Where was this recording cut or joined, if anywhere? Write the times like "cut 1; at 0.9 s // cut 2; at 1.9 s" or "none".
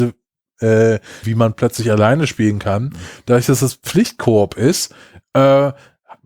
cut 1; at 1.2 s